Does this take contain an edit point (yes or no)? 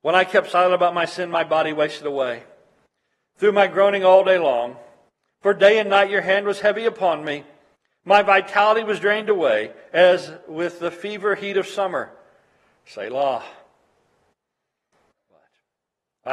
no